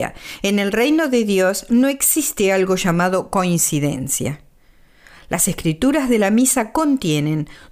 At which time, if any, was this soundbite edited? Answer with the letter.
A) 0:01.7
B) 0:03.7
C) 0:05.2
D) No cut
D